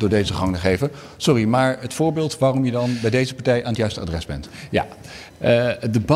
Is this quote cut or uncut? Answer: uncut